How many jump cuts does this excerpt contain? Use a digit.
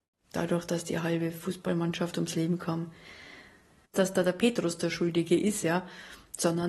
1